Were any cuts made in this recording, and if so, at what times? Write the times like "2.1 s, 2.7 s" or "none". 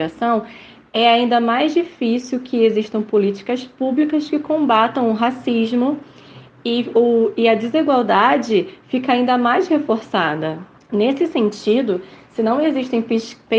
6.9 s, 10.8 s